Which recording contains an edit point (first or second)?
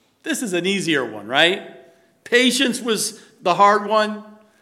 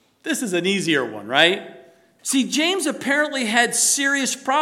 second